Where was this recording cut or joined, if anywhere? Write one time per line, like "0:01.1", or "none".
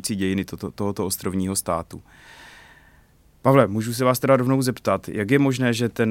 none